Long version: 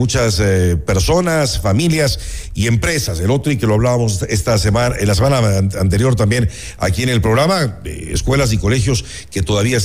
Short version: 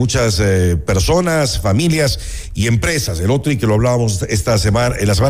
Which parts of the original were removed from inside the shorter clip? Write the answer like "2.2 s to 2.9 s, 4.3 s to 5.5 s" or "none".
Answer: none